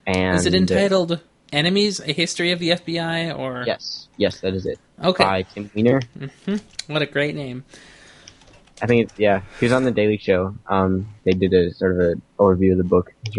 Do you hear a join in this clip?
yes; 1 cut; at 4.1 s

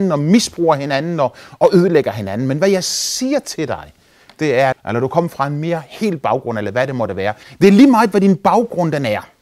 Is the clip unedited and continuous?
no; 2 cuts; at 4.7 s, 7.4 s

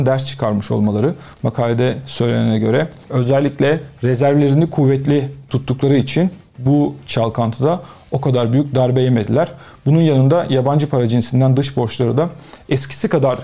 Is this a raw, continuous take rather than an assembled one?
yes; 0 cuts

